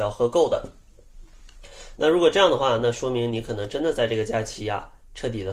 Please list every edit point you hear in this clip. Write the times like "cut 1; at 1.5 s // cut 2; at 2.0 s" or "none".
cut 1; at 1.9 s